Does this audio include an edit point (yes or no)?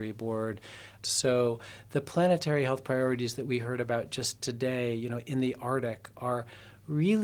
yes